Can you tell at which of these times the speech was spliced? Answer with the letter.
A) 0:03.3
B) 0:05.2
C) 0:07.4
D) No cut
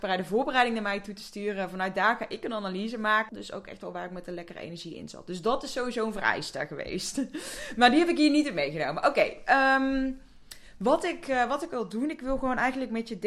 A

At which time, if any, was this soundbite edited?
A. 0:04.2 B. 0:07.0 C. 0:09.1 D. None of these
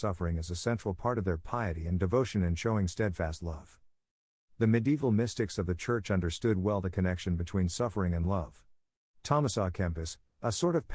C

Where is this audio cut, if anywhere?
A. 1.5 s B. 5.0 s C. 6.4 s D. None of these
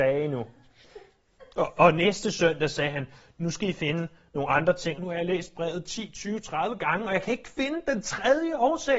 B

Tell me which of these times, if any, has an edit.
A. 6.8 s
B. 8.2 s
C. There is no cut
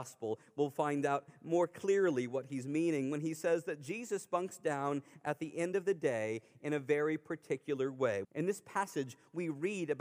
B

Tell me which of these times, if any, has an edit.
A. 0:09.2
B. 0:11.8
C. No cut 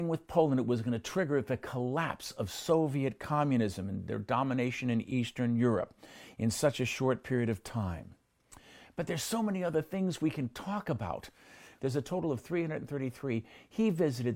B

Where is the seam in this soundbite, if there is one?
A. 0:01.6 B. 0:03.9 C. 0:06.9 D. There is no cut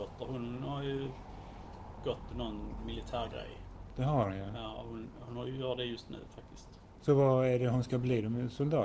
D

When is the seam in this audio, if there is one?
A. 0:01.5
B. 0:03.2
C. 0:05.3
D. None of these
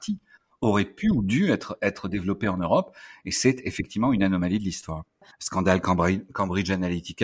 C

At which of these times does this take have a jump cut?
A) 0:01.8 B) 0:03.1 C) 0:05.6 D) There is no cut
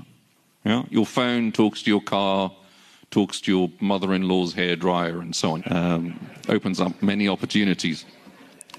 C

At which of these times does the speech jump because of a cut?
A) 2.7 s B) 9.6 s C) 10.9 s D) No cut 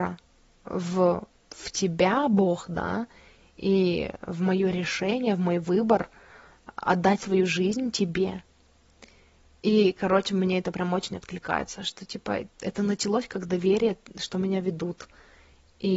D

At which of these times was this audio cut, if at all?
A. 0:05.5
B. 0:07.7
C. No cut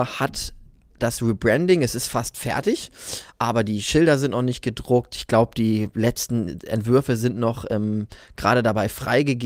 C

